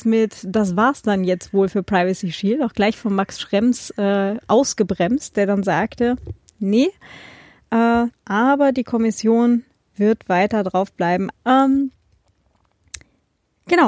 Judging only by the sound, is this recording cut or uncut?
cut